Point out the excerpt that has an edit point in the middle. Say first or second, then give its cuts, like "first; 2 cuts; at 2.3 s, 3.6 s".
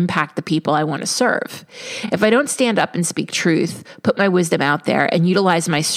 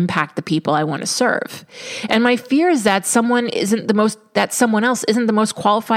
second; 1 cut; at 2.1 s